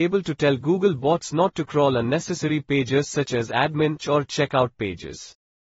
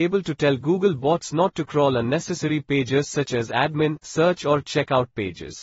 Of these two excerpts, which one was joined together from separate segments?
first; 1 cut; at 4.0 s

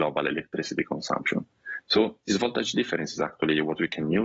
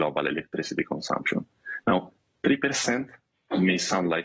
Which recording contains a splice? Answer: first; 1 cut; at 1.8 s

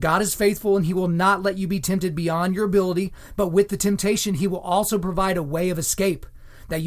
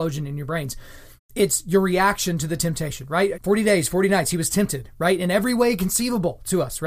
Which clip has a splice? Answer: second; 2 cuts; at 1.2 s, 3.3 s

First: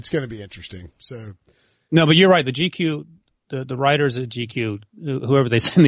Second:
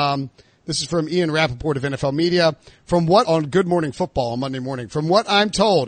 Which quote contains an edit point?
second; 1 cut; at 3.2 s

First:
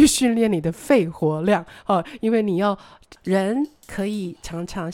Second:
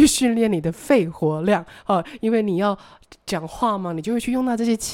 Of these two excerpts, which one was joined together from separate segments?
first; 1 cut; at 3.2 s

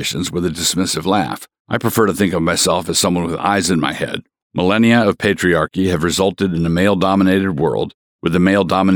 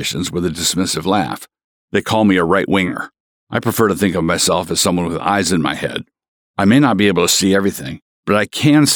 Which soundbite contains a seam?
first; 2 cuts; at 1.6 s, 4.4 s

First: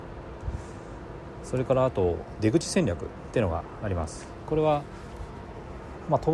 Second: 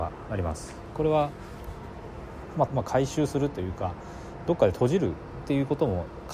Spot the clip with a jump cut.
second; 1 cut; at 2.7 s

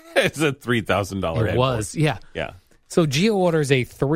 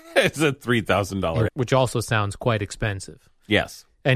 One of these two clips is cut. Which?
second; 1 cut; at 1.5 s

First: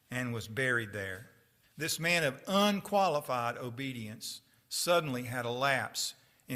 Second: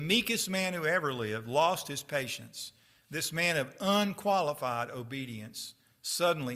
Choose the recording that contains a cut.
first; 1 cut; at 1.6 s

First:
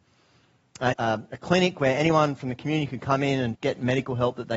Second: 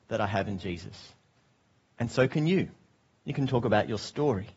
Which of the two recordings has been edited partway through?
first; 2 cuts; at 0.9 s, 3.5 s

